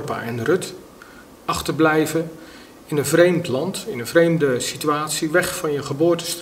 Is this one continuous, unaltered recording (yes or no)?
no